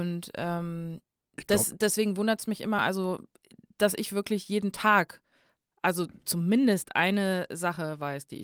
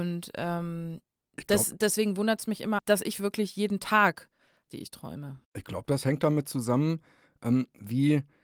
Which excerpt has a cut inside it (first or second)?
second